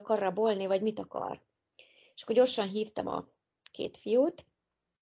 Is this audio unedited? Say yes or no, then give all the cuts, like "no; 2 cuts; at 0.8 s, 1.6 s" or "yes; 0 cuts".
yes; 0 cuts